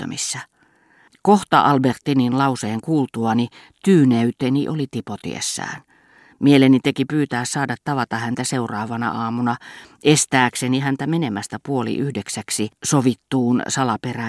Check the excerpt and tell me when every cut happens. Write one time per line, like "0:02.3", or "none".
none